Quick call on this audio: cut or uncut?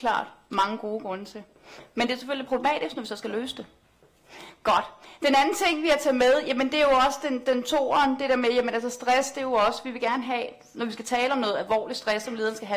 uncut